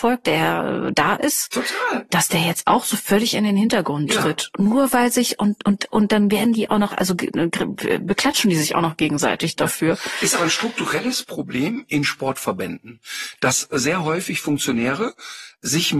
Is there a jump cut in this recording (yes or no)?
no